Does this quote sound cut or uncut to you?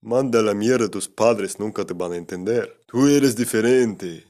cut